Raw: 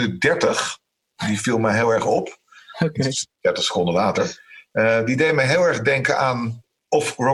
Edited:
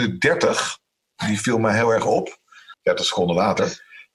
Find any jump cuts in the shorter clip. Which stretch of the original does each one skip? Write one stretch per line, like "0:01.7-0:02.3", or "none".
0:02.7-0:03.3